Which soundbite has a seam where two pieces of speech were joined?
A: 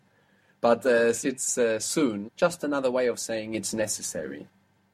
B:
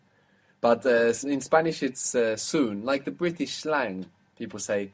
A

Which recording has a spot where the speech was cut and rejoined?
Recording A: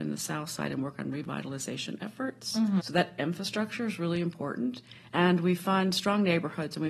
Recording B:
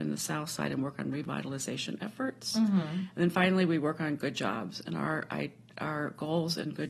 A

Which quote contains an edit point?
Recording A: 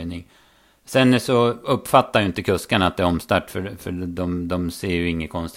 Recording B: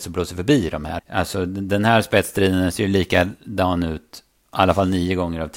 B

